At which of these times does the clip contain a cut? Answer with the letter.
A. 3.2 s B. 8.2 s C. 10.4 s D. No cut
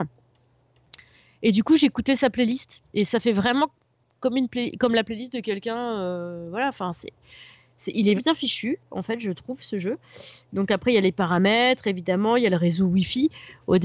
B